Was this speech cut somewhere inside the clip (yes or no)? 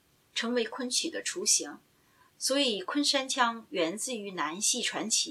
yes